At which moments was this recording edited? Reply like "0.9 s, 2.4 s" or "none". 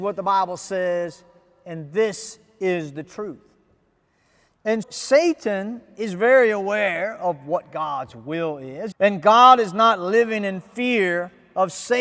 4.8 s, 8.9 s